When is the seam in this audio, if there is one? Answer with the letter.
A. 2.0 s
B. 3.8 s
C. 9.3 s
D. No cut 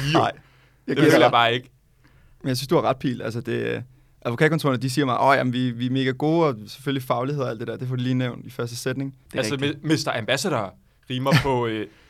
C